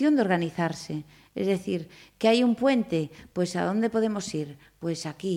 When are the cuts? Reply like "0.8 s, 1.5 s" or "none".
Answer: none